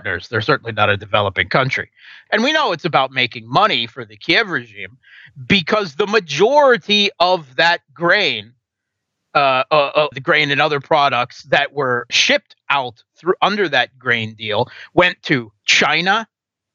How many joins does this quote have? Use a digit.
3